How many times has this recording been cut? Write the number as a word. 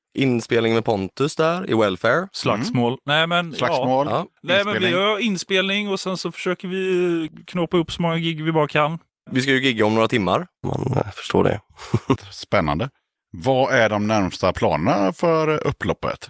two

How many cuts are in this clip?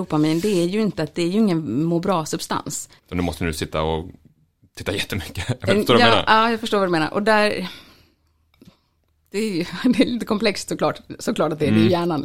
one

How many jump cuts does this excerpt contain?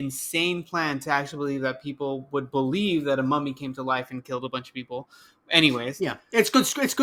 zero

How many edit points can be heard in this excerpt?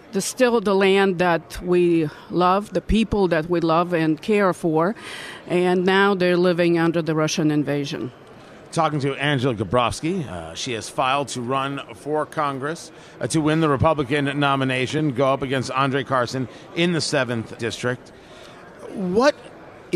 one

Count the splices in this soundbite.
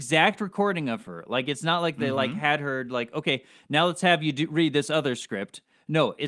zero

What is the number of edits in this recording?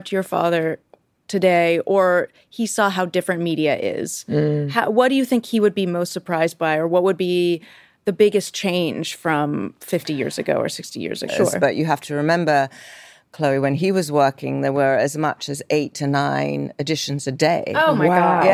one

